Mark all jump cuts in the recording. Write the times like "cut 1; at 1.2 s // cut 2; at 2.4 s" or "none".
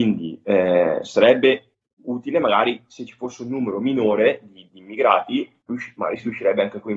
cut 1; at 4.7 s